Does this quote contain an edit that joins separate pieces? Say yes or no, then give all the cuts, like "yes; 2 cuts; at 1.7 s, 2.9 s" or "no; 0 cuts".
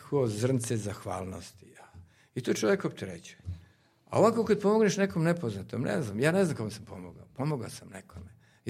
no; 0 cuts